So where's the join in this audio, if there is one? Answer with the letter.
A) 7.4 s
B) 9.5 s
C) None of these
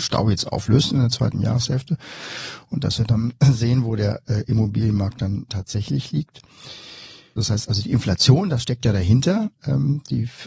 A